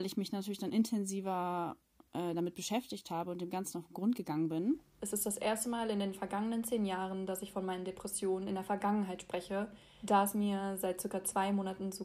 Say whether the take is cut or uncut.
cut